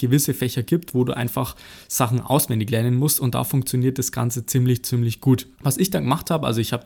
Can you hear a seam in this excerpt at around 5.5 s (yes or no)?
yes